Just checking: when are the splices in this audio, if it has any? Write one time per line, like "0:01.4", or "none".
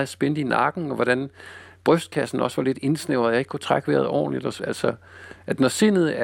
0:04.6